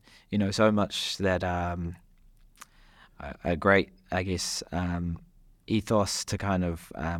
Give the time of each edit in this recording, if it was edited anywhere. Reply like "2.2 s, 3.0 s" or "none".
none